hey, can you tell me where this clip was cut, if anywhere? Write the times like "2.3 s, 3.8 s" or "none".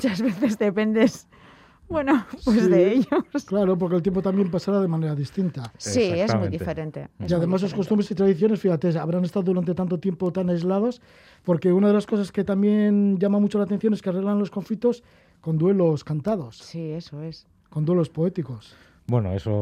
none